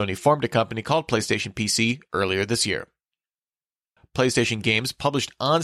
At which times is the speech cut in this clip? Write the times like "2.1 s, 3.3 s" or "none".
4.0 s

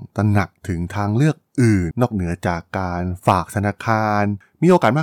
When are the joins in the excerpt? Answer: 1.9 s

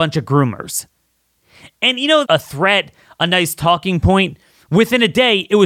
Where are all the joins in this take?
2.2 s

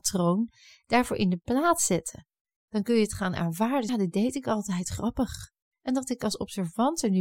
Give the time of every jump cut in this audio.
3.9 s, 5.7 s

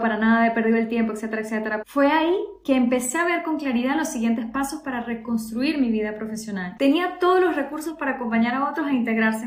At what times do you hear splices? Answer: 1.8 s, 6.8 s

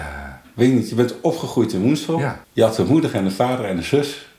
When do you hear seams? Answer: 2.4 s

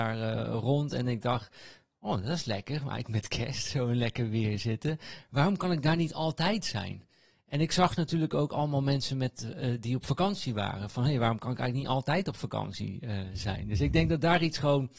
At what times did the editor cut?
none

